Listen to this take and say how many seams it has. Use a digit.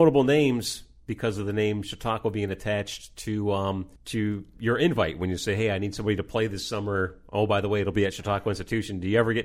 1